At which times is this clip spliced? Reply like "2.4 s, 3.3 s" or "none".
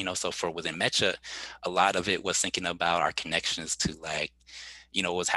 none